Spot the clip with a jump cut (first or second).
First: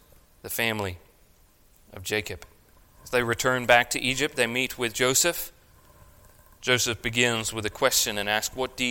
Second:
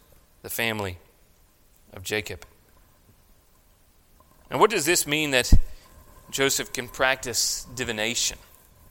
first